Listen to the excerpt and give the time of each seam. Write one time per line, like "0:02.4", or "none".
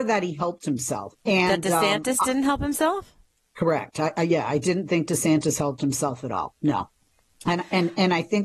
0:01.2

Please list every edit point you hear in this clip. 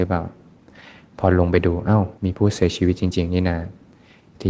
0:02.2

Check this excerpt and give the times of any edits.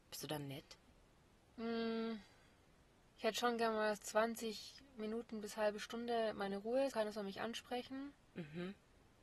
0:04.0
0:06.9

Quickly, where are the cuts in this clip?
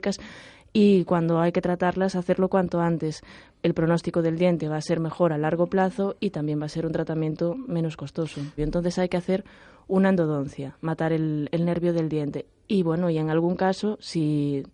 0:03.5
0:08.6

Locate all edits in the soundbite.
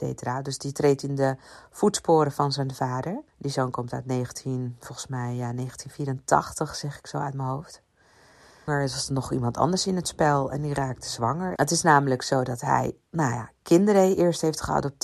0:03.3
0:08.7
0:11.6

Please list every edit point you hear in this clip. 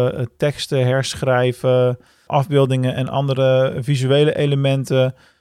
0:02.3

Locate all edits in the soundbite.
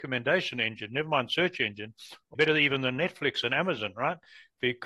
0:02.4

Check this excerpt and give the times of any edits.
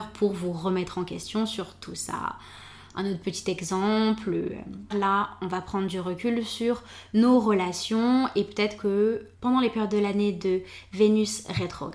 0:04.9
0:09.3

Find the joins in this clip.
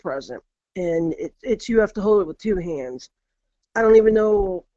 0:03.6

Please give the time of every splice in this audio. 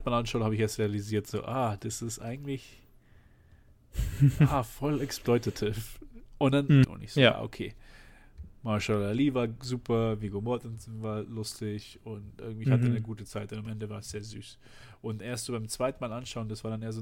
0:06.8

